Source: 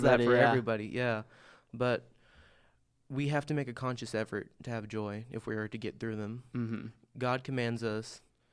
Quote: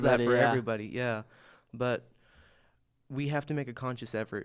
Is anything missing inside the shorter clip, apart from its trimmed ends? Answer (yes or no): no